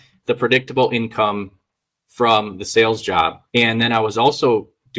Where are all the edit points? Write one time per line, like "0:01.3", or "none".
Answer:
0:03.5